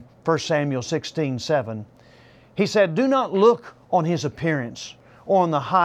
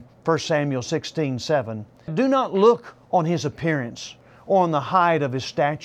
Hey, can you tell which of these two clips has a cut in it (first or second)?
second